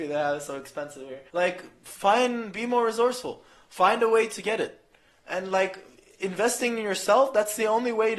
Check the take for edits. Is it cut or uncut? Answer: cut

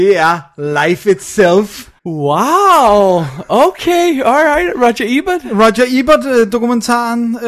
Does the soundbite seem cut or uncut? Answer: cut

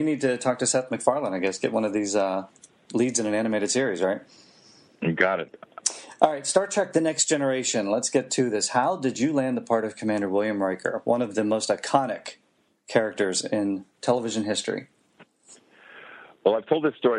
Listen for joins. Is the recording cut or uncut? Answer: uncut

